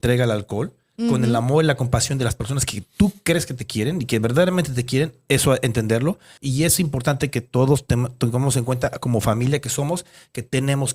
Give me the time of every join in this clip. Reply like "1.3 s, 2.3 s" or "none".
6.4 s

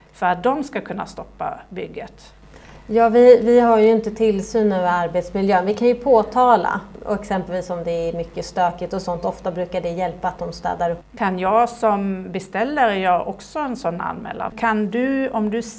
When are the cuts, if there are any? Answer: 11.0 s, 14.5 s

